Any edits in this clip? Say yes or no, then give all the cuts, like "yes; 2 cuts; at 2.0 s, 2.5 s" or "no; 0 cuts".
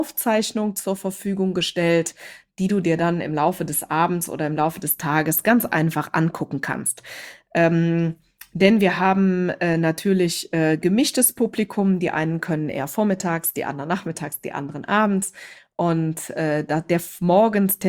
no; 0 cuts